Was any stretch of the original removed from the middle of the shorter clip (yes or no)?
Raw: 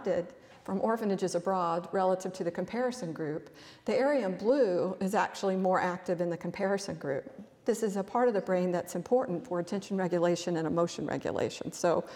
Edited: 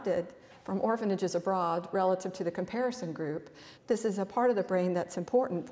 yes